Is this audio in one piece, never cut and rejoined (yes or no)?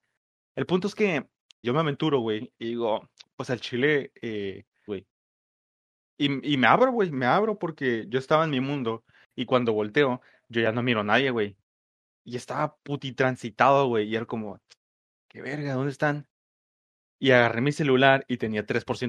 no